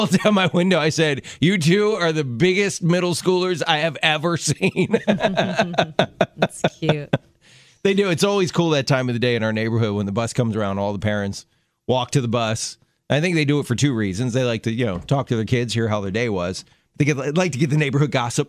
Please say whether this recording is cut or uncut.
uncut